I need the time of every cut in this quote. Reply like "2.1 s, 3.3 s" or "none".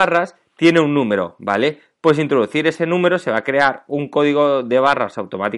none